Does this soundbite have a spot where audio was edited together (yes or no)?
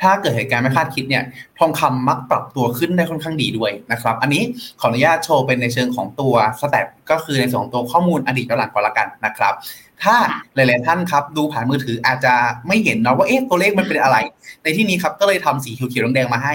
no